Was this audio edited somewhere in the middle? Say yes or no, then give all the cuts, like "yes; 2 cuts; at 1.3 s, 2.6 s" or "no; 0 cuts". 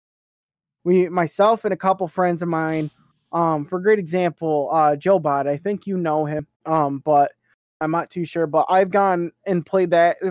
yes; 1 cut; at 6.5 s